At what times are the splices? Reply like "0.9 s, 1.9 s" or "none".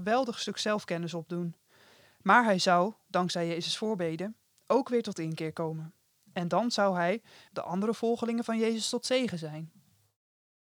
7.5 s